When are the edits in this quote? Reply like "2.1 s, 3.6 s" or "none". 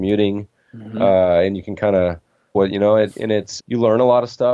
2.5 s, 3.6 s